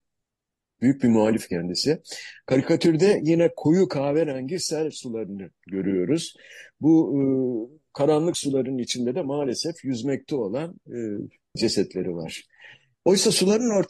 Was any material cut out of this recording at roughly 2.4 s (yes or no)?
no